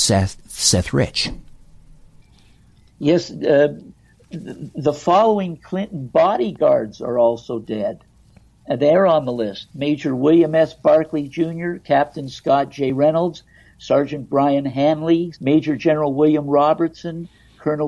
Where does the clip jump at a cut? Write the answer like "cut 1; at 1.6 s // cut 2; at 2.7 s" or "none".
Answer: cut 1; at 15.3 s